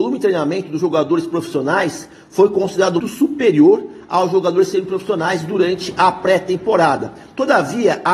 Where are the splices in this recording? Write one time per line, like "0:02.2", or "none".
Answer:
0:03.0